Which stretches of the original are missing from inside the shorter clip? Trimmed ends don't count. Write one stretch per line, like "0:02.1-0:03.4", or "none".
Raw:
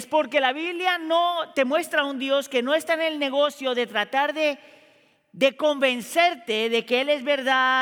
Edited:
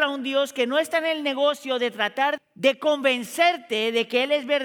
0:04.3-0:05.2